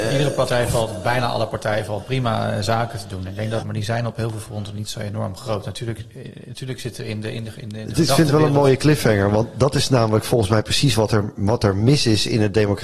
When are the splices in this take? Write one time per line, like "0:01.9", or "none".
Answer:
0:03.6